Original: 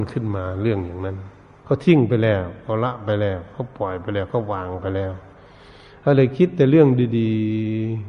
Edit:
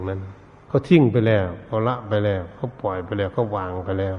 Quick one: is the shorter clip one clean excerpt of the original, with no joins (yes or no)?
yes